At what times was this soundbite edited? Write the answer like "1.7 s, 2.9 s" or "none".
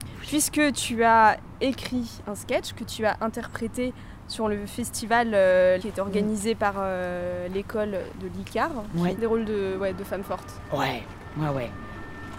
5.8 s, 9.1 s